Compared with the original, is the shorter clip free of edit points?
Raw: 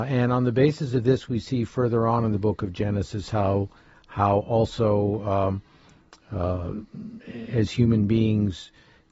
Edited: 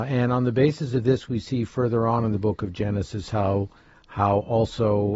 yes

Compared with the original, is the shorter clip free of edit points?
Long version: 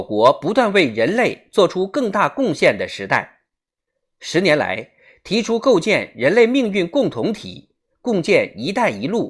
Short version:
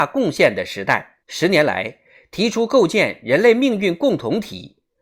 no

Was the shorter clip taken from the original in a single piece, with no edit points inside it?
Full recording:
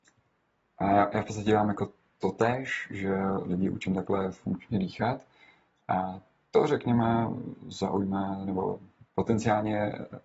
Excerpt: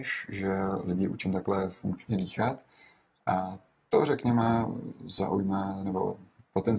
yes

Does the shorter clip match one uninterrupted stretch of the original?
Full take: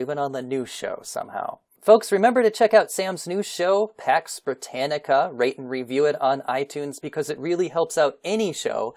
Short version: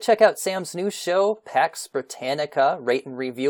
yes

